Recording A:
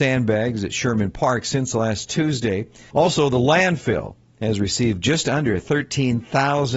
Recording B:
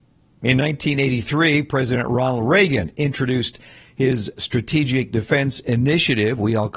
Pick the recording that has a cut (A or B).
A